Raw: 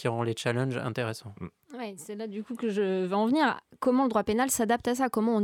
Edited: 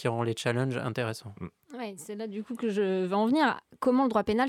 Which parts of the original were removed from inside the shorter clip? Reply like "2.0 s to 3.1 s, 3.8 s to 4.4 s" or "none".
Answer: none